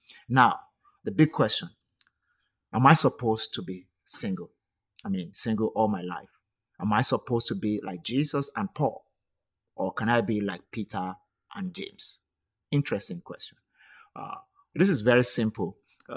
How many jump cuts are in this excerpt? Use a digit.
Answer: 0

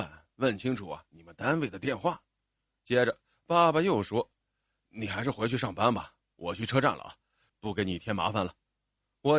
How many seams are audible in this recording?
1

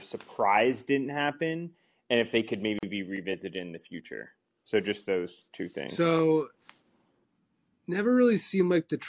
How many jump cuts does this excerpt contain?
0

